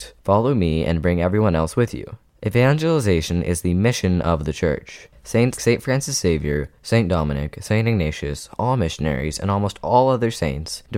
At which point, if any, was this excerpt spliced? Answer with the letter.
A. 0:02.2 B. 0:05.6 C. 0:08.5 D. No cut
B